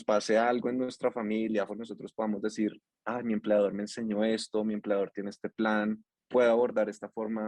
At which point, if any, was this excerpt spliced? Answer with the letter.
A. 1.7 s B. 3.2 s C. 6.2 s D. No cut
A